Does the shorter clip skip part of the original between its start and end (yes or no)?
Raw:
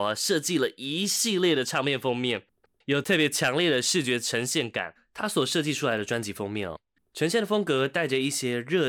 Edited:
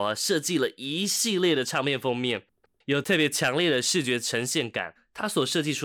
no